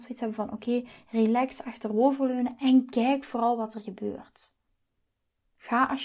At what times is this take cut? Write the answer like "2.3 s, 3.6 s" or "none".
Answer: none